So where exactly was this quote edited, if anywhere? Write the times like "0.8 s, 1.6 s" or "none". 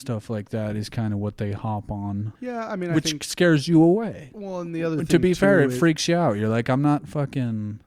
2.4 s